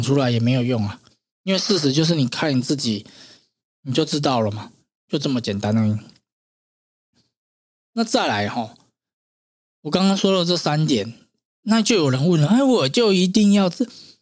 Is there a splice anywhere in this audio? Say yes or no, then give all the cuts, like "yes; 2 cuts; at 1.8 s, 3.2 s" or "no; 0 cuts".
no; 0 cuts